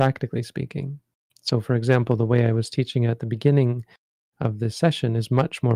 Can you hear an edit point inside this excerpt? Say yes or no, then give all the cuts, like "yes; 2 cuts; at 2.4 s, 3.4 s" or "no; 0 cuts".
yes; 1 cut; at 1.3 s